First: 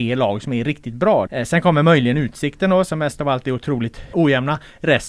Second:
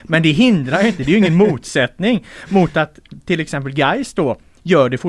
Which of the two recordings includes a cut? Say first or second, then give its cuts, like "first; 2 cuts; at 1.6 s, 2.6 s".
first; 2 cuts; at 1.3 s, 4.1 s